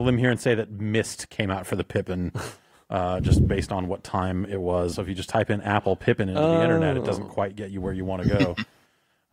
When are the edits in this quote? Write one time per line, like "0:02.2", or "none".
0:04.9